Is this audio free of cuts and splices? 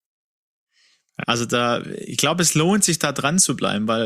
no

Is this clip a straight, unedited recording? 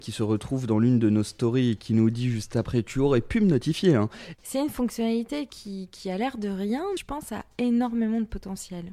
no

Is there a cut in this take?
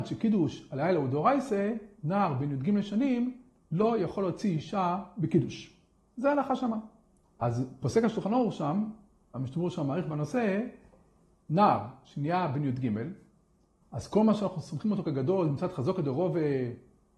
yes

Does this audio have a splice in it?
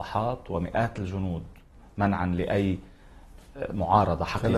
no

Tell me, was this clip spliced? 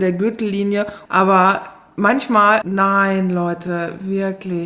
yes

